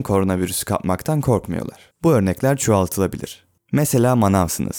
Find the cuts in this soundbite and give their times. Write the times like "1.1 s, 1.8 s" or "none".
1.9 s